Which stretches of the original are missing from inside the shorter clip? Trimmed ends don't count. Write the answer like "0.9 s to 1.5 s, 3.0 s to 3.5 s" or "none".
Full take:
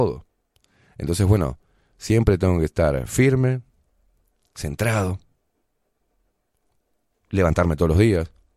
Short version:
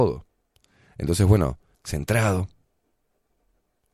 1.7 s to 4.5 s